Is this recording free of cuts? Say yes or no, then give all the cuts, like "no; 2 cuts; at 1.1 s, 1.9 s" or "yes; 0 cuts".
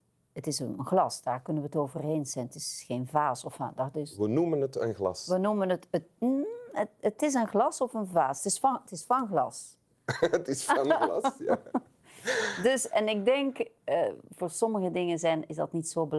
yes; 0 cuts